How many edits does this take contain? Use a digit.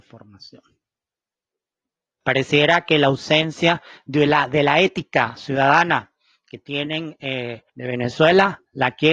2